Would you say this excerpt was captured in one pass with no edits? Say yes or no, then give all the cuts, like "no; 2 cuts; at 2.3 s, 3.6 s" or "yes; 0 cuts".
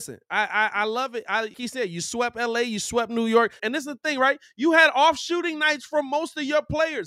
no; 2 cuts; at 1.5 s, 3.6 s